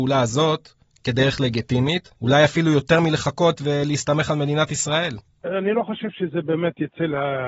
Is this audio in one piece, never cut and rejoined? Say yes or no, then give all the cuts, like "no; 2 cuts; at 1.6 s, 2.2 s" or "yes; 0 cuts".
no; 1 cut; at 2.2 s